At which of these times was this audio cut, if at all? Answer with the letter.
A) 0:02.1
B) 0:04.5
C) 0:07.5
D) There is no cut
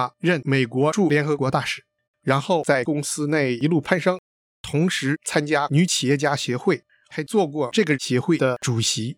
A